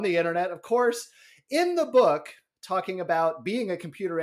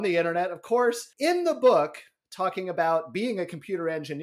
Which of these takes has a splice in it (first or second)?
second